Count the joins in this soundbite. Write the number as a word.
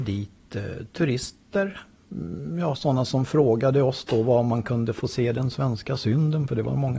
zero